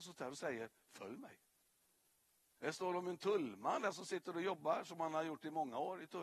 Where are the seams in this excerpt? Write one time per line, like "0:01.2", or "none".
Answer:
0:02.6